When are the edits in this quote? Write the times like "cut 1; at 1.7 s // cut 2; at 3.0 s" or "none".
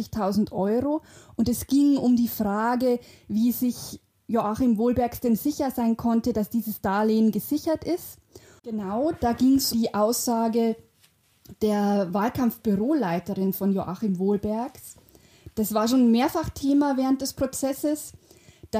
cut 1; at 8.6 s // cut 2; at 9.7 s